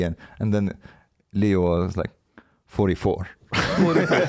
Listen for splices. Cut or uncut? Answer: uncut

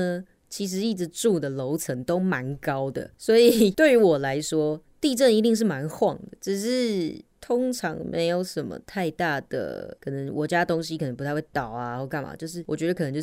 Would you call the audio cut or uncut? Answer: uncut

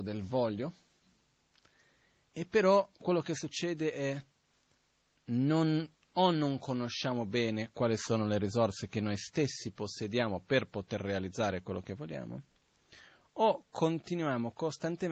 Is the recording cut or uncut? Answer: uncut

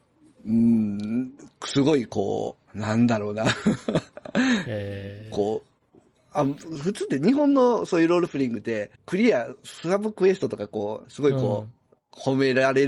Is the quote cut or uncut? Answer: cut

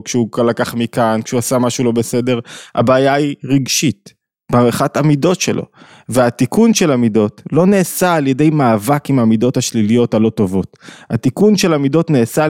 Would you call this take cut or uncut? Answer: uncut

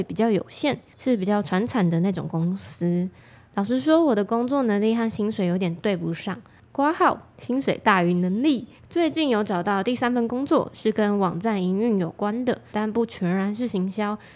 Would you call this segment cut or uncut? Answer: cut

